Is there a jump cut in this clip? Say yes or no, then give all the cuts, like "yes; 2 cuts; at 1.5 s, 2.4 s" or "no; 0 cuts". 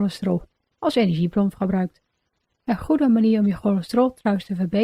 yes; 1 cut; at 2.5 s